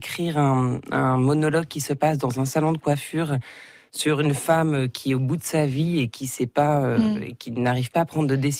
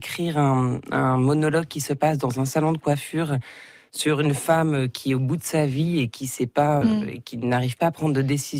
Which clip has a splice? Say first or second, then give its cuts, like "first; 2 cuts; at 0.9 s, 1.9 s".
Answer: second; 1 cut; at 6.8 s